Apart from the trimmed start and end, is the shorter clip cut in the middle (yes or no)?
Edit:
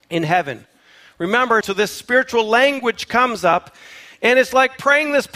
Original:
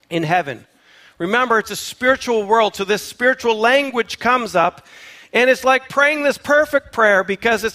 yes